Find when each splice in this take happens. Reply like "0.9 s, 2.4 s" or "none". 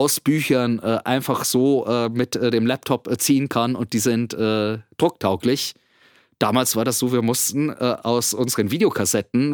none

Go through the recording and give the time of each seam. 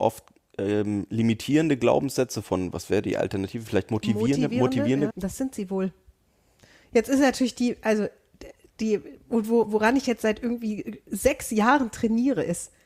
5.1 s

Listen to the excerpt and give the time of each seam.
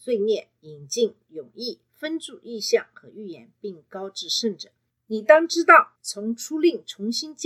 6.0 s

